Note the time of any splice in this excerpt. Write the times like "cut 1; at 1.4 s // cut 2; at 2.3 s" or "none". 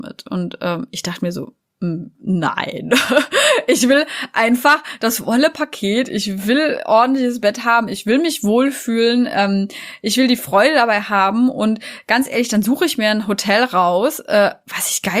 none